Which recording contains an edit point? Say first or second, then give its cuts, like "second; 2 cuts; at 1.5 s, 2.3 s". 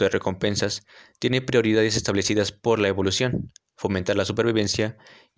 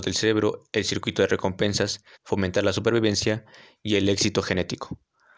second; 1 cut; at 2.1 s